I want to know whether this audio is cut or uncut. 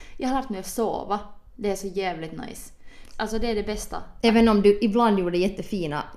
cut